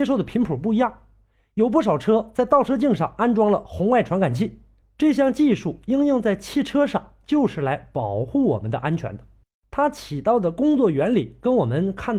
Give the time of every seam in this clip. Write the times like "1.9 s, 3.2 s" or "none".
4.8 s